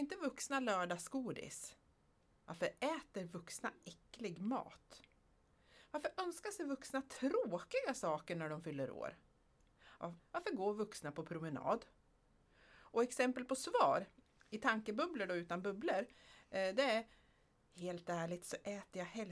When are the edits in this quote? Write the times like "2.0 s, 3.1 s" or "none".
10.2 s